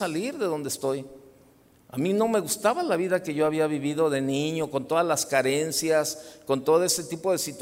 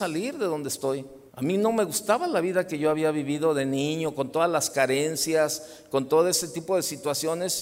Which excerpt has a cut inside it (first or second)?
second